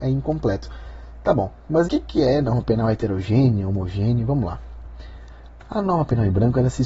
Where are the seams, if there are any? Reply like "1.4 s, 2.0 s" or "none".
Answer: 1.9 s